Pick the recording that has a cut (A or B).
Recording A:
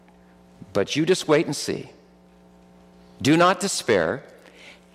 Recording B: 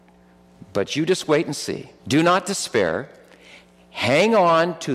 B